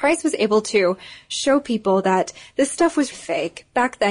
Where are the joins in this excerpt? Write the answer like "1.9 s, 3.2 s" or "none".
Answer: 3.1 s